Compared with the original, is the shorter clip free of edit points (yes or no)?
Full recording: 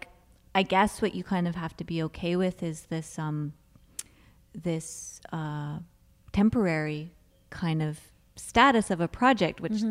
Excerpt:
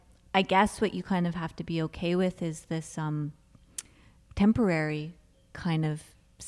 no